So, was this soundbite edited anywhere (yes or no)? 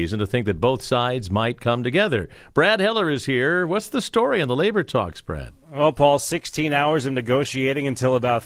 yes